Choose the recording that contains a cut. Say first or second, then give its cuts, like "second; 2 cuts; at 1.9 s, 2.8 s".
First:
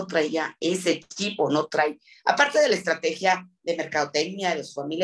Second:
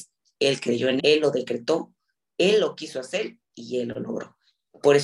second; 1 cut; at 1.0 s